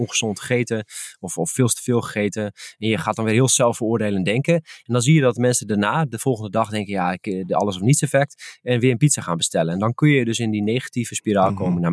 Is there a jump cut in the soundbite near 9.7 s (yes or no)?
no